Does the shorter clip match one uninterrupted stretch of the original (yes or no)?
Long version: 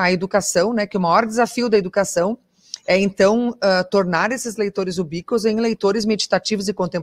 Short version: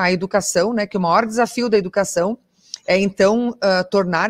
yes